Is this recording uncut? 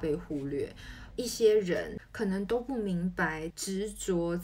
no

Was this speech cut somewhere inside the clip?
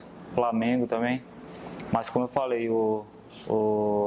yes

